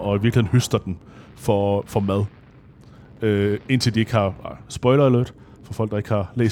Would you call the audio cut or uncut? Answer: uncut